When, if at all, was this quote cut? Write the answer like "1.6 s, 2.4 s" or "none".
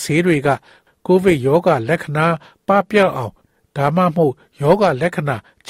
none